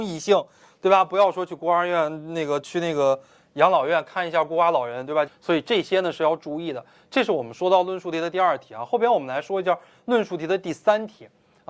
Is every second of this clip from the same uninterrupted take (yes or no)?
no